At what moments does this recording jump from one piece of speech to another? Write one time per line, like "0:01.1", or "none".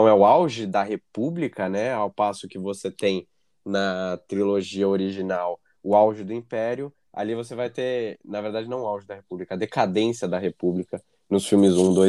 none